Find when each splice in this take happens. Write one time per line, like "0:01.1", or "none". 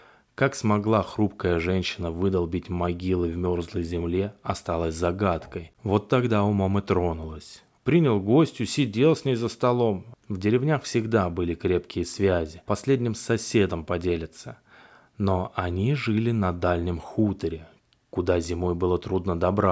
0:05.7
0:07.8
0:10.1